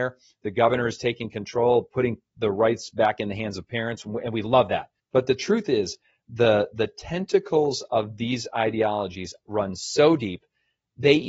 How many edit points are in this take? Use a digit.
1